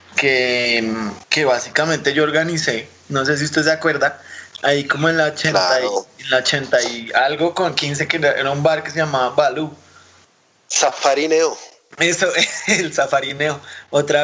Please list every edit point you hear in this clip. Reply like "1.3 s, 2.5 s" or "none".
1.2 s

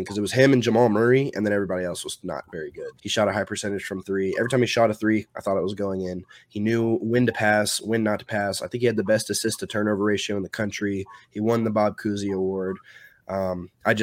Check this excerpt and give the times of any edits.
3.0 s

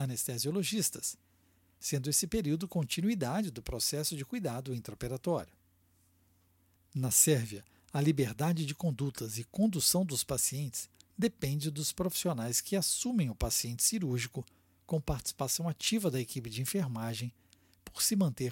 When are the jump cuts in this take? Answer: 6.8 s

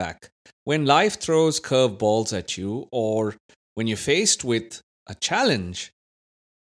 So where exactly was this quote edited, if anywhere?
none

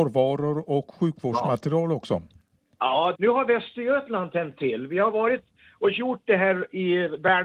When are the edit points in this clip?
3.1 s

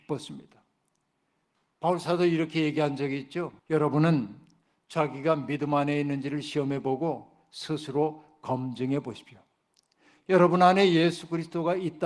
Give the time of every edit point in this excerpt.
3.6 s

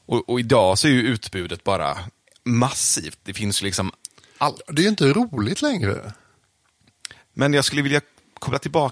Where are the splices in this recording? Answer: 7.2 s

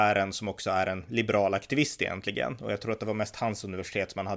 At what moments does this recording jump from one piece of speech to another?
none

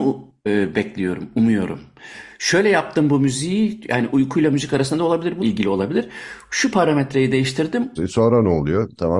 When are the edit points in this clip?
5.4 s, 8.0 s

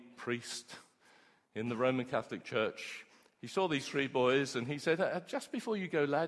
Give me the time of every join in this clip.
none

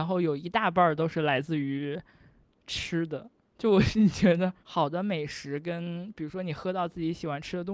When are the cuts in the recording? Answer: 4.6 s

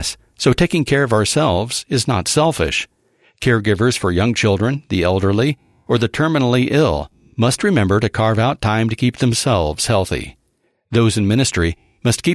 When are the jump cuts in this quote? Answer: none

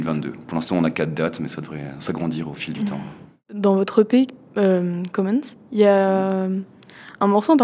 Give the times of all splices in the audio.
none

